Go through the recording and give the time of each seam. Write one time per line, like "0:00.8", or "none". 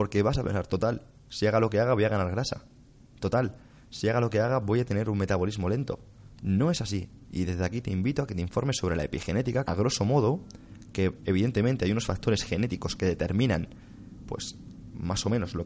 0:06.4
0:09.6

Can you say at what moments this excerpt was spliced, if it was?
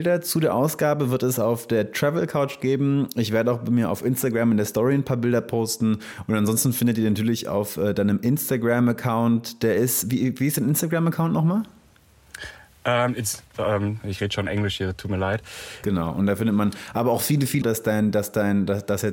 0:14.0
0:15.8
0:17.6

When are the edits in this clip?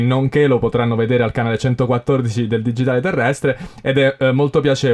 none

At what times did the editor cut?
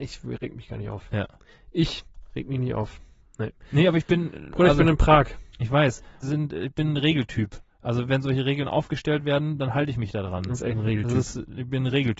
0:06.2

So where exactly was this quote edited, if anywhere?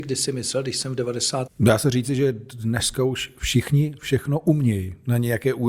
0:01.5

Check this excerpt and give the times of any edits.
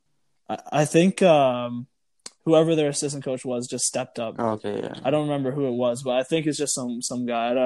none

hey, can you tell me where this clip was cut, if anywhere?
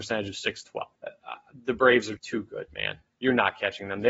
0:01.0
0:02.2

